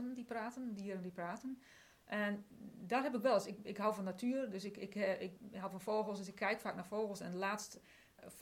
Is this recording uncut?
yes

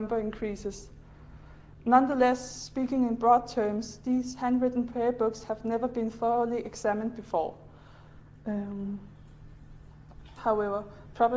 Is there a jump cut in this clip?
yes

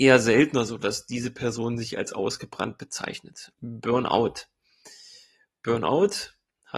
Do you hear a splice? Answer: yes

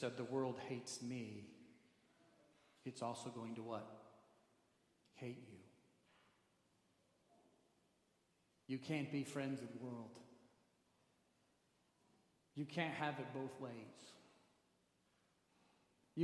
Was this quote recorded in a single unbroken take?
yes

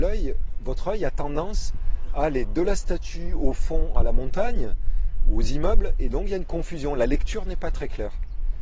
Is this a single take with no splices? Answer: yes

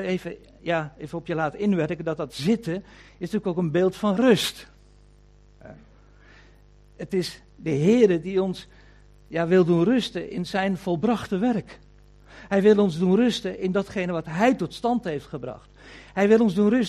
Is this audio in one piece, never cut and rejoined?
yes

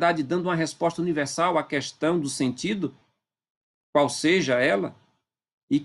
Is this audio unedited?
yes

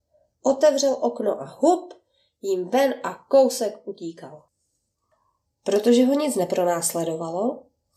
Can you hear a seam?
yes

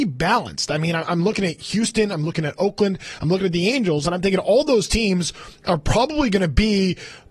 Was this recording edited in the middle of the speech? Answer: no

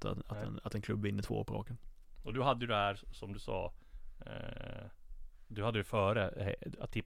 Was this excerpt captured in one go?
yes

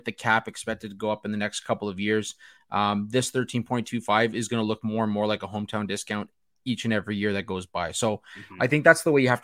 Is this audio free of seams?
yes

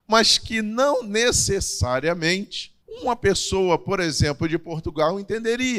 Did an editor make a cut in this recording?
yes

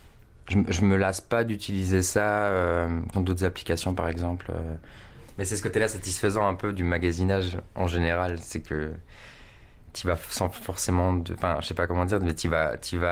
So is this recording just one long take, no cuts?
no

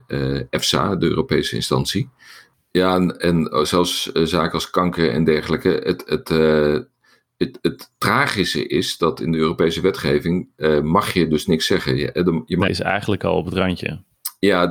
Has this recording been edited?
yes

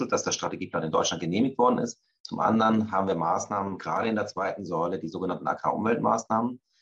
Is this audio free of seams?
yes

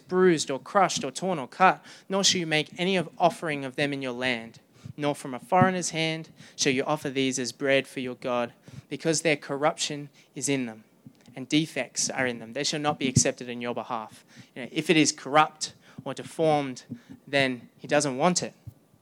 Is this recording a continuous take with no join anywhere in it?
yes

